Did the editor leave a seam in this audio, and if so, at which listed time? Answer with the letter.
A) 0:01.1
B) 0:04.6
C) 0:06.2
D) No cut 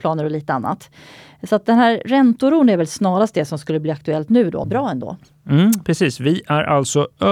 B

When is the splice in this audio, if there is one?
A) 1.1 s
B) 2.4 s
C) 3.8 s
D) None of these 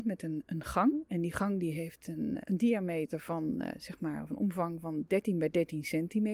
B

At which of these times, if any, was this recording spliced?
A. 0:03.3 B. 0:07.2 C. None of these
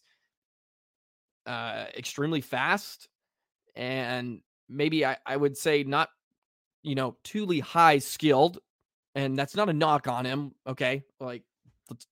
C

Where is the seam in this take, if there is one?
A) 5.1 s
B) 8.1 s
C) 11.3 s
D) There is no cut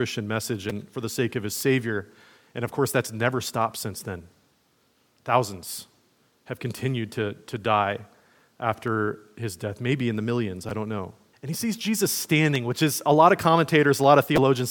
C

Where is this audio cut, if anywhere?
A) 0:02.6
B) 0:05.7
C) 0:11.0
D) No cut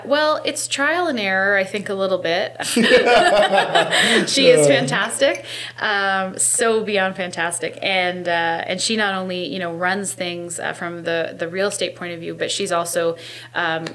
A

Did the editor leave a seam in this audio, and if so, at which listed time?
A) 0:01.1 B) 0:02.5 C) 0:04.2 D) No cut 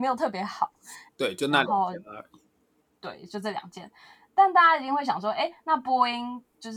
A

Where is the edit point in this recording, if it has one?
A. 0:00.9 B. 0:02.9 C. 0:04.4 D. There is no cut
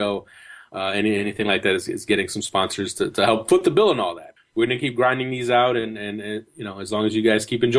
C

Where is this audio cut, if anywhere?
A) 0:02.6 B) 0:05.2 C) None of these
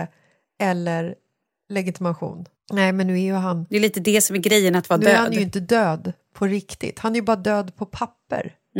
A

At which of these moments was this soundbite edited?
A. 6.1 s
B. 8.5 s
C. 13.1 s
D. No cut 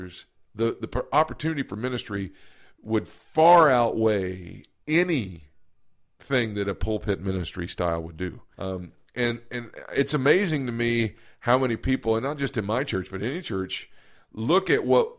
B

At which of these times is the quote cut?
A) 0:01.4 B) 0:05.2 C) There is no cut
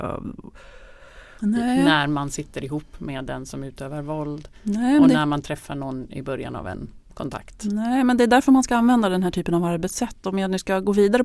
A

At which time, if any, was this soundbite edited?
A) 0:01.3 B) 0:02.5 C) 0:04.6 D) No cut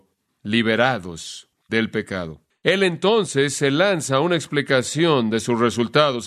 B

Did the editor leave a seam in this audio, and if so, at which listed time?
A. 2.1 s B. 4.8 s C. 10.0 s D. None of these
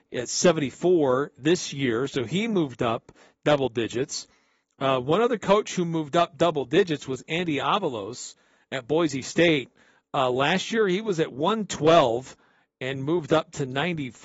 D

